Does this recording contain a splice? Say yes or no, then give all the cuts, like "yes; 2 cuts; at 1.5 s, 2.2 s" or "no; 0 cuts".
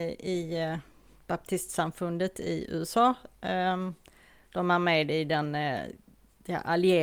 yes; 1 cut; at 4.5 s